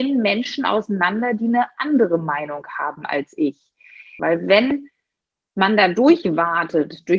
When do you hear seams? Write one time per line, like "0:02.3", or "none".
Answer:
0:04.2